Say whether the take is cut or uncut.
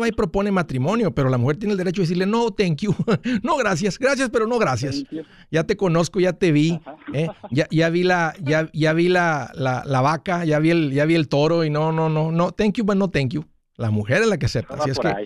uncut